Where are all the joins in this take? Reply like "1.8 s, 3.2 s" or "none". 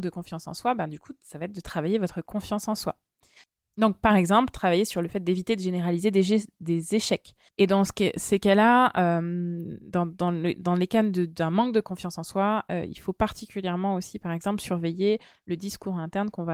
7.5 s